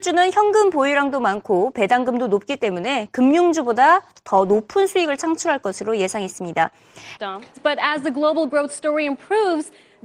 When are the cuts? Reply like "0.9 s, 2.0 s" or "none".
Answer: 7.2 s